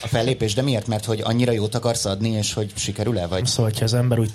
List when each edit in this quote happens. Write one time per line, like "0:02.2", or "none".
0:03.4